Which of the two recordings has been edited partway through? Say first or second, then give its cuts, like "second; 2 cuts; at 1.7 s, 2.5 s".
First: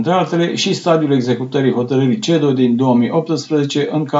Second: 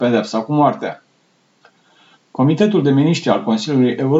second; 1 cut; at 2.1 s